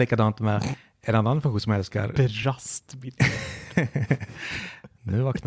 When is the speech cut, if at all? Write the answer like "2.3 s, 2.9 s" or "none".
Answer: none